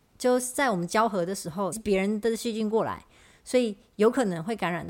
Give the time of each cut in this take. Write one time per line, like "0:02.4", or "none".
0:01.7